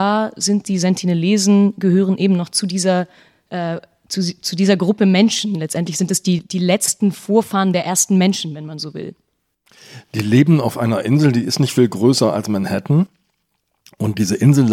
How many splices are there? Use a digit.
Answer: 0